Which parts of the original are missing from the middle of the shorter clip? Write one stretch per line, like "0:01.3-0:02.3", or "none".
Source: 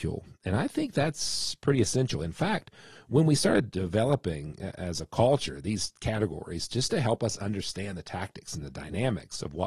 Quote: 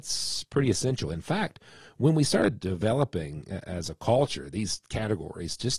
none